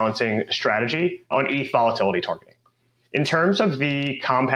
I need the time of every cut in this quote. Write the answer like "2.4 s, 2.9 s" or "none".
1.3 s, 3.0 s